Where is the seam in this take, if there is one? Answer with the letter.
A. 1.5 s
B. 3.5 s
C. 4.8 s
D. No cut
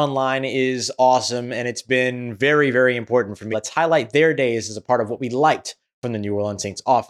B